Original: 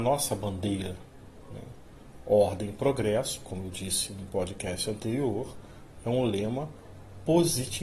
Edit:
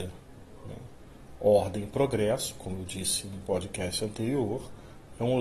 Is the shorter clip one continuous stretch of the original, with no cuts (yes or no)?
yes